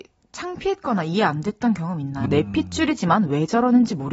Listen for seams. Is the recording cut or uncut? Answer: cut